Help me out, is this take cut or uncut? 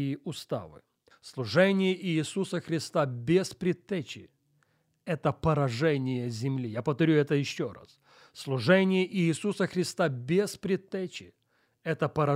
cut